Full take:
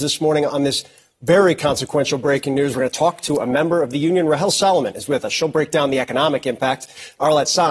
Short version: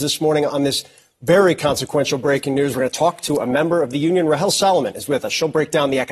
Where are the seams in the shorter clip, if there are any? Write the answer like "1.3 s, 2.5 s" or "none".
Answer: none